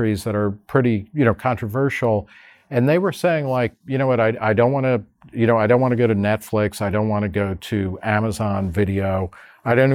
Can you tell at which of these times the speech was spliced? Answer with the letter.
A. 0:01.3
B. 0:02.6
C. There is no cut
C